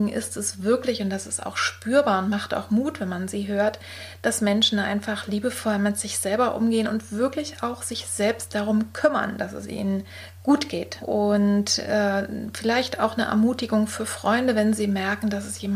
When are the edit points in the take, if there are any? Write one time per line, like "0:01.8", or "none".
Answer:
0:11.0